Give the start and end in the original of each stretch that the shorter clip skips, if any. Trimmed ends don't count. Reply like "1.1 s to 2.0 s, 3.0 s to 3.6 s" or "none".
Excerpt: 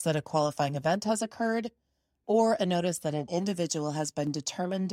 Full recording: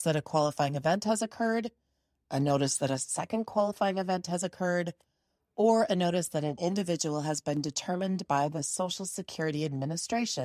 2.2 s to 5.5 s